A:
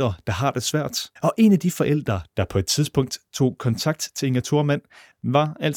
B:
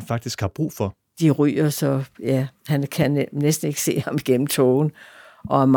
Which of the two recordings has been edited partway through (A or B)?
A